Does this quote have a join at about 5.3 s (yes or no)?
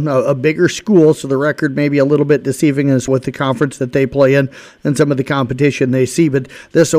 no